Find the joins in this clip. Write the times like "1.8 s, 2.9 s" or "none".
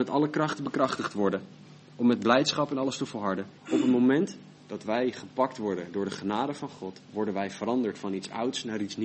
3.6 s, 7.0 s